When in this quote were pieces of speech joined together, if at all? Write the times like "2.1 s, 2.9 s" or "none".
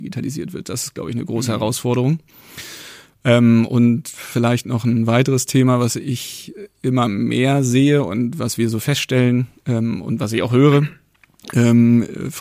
none